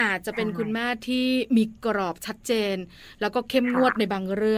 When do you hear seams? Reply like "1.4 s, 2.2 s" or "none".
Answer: none